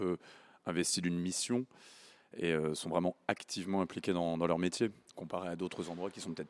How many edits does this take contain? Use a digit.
0